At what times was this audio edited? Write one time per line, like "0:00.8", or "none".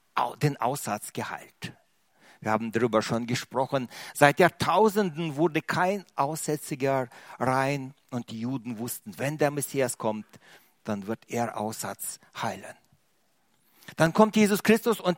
none